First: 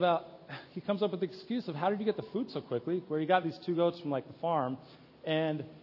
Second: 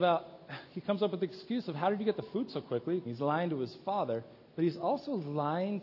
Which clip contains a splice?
second; 1 cut; at 3.0 s

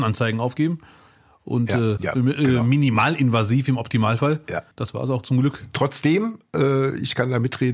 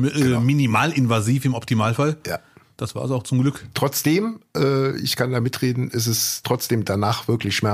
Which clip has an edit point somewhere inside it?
first; 2 cuts; at 2.0 s, 4.7 s

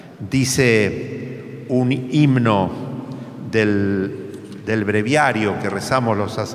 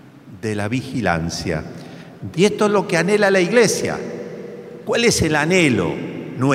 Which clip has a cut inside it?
second; 2 cuts; at 2.3 s, 4.8 s

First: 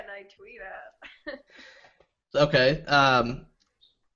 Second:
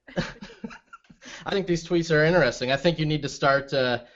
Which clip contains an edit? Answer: second; 1 cut; at 1.5 s

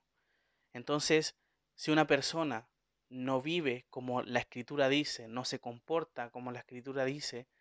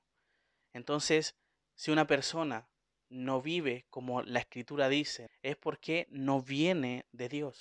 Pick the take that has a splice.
second; 1 cut; at 5.3 s

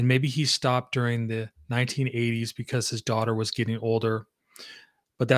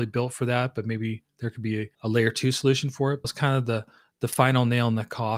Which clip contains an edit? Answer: second; 2 cuts; at 1.9 s, 3.2 s

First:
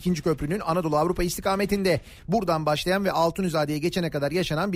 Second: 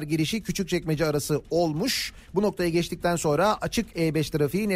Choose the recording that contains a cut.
first; 1 cut; at 2.2 s

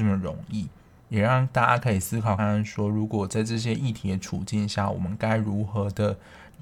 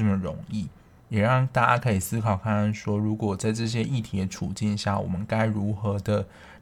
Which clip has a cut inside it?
first; 1 cut; at 2.4 s

